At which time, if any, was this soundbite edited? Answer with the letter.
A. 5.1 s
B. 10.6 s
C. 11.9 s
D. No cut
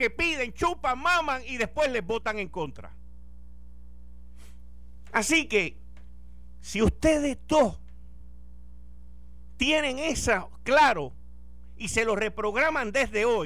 D